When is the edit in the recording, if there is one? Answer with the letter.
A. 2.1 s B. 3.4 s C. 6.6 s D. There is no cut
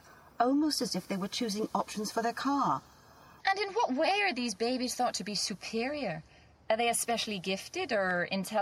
B